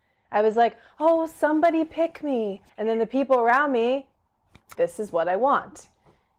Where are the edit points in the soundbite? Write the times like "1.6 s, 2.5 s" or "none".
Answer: 2.7 s, 4.8 s